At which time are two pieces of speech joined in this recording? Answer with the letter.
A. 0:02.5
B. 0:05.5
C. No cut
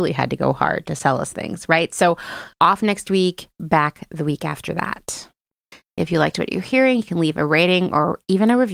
A